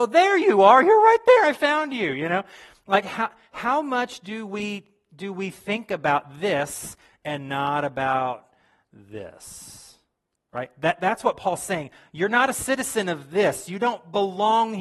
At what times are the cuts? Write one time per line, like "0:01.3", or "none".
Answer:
none